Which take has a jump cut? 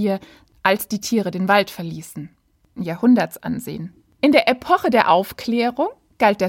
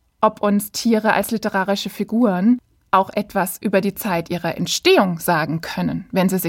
first; 1 cut; at 2.8 s

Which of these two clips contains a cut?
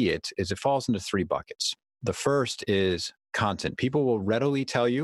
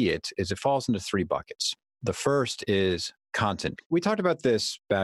second; 1 cut; at 3.8 s

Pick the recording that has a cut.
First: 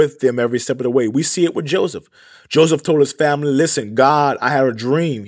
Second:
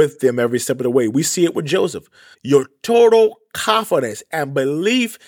second; 1 cut; at 2.3 s

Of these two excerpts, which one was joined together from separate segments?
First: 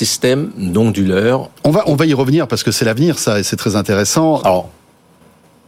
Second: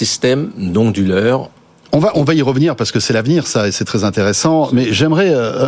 first; 2 cuts; at 1.6 s, 4.4 s

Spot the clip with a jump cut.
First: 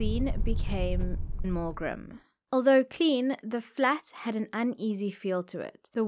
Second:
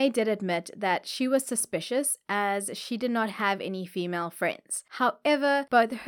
first; 1 cut; at 1.4 s

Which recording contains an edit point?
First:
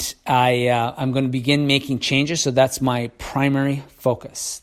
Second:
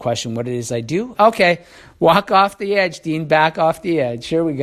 second; 1 cut; at 1.1 s

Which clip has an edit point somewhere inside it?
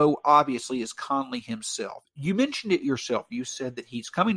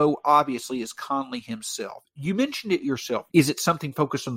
second; 1 cut; at 3.3 s

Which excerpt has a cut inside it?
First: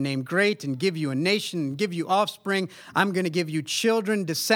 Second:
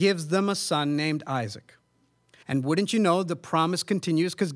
second; 1 cut; at 2.4 s

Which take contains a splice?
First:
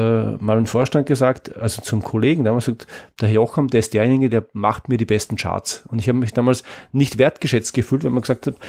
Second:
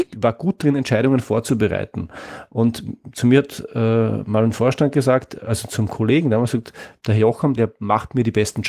second; 1 cut; at 7.6 s

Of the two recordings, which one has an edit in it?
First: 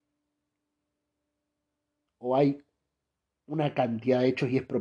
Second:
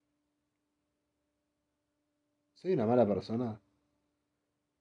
first; 1 cut; at 2.1 s

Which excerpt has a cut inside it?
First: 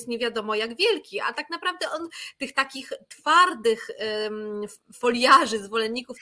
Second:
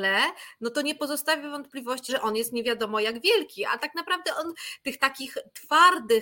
second; 1 cut; at 2.1 s

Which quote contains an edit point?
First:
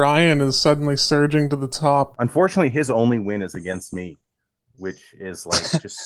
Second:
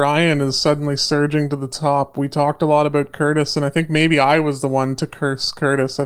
first; 1 cut; at 2.1 s

